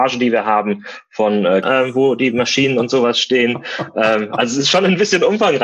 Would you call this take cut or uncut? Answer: cut